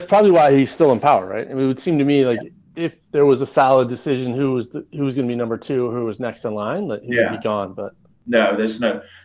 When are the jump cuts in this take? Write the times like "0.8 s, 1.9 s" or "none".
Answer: none